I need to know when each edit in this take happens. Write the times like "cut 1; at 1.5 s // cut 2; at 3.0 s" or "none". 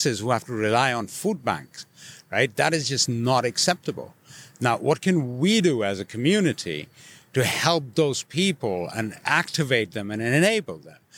none